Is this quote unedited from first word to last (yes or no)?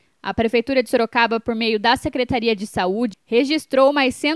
no